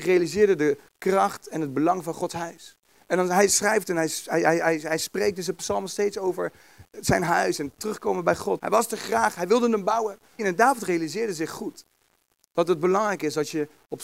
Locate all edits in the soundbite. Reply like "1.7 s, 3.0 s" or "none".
8.6 s, 10.4 s